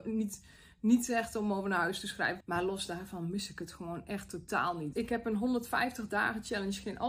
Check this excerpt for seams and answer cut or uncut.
cut